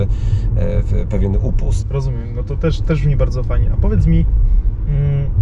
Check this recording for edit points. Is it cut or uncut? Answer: cut